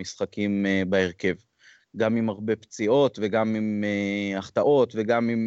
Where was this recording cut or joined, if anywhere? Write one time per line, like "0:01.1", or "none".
0:01.8